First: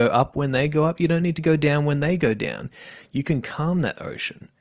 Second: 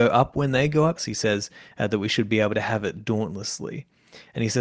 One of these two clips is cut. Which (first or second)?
second